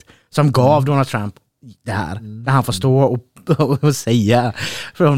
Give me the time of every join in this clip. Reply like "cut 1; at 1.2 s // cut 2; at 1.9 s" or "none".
none